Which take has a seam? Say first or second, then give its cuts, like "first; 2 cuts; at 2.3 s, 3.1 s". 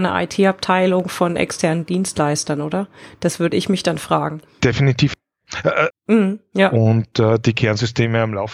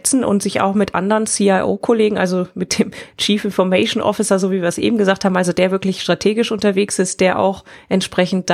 first; 1 cut; at 5.9 s